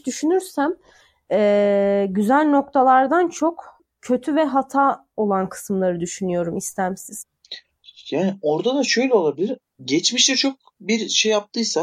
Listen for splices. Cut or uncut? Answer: uncut